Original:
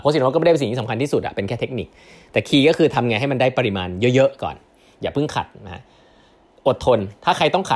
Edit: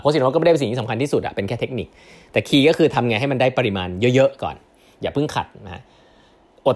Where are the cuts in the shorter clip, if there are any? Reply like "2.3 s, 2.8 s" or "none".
none